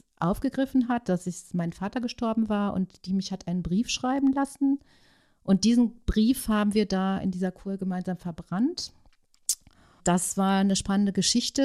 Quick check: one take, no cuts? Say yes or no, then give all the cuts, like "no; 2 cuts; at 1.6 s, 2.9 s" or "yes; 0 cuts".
no; 1 cut; at 10.0 s